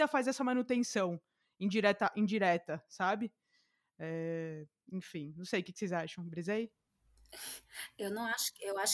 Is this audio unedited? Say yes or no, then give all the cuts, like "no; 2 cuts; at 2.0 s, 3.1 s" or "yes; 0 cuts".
yes; 0 cuts